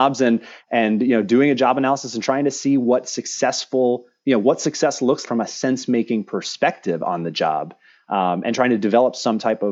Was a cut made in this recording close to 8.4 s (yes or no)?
no